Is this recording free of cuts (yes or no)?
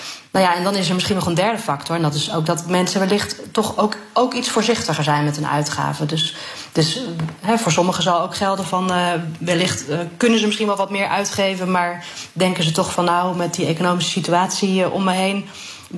yes